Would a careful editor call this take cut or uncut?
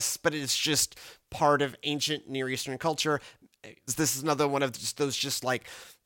cut